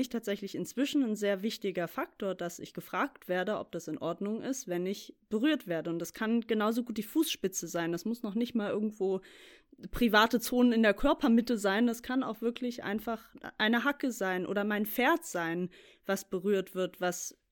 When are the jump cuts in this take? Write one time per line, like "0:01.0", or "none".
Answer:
none